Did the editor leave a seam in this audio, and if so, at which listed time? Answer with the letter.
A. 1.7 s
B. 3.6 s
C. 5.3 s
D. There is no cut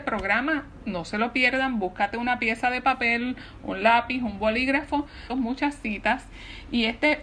C